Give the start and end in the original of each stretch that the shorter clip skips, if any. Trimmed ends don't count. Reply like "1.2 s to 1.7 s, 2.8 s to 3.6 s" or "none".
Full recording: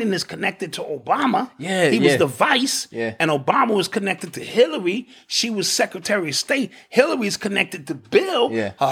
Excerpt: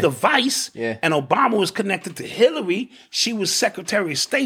none

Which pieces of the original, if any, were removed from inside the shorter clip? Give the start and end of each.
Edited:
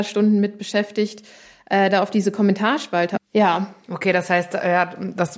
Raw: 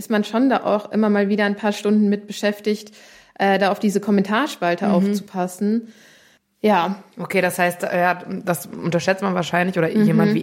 4.9 s to 6.5 s

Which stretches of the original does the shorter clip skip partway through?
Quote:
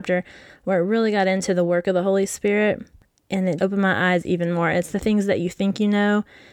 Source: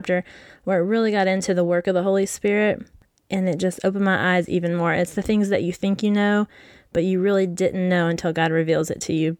3.6 s to 3.8 s

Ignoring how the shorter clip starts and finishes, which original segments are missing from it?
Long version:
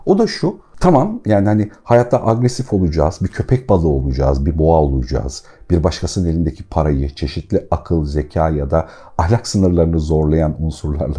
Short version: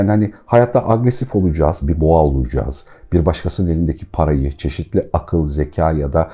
3.2 s to 4.4 s

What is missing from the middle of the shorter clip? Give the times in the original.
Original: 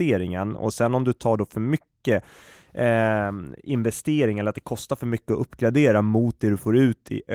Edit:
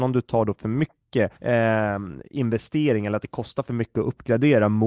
2.3 s to 2.7 s

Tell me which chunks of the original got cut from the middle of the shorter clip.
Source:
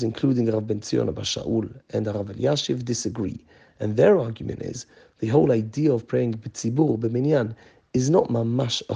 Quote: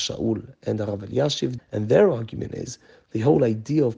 2.8 s to 3.7 s

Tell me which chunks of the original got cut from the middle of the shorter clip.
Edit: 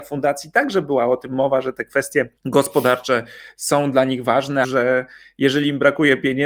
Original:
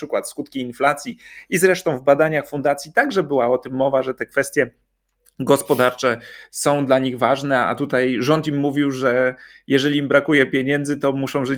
4.8 s to 5.3 s, 7.6 s to 8.9 s

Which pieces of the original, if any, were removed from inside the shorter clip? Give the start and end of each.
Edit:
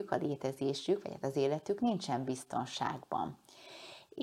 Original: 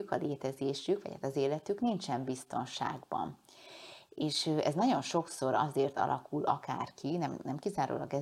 none

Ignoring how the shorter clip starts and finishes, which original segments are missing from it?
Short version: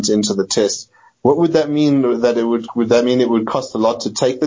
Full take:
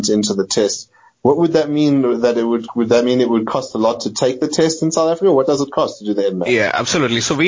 none

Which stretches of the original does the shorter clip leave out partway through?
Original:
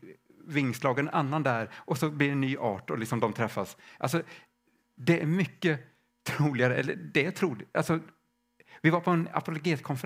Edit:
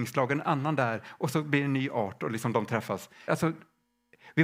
3.9 s to 7.7 s

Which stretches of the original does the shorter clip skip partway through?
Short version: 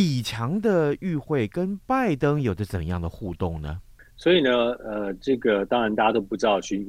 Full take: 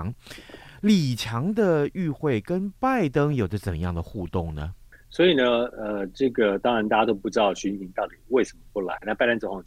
none

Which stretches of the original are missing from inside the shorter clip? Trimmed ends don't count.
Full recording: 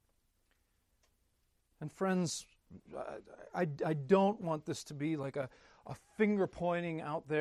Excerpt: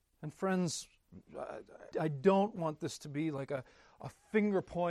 3.5 s to 3.8 s

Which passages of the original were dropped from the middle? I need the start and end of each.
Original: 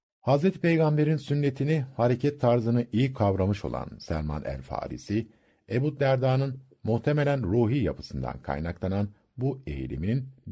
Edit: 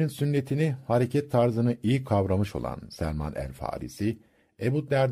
none

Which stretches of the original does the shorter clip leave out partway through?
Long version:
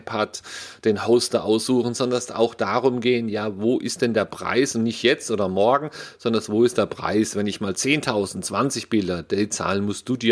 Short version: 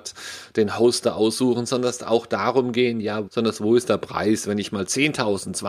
3.5 s to 6.1 s

